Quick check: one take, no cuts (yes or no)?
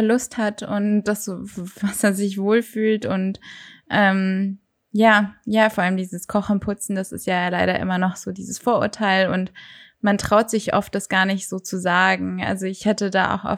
yes